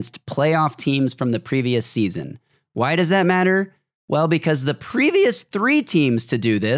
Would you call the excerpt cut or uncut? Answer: uncut